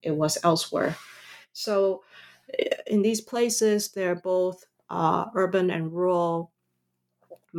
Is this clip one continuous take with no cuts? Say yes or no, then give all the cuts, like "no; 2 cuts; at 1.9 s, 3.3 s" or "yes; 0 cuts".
yes; 0 cuts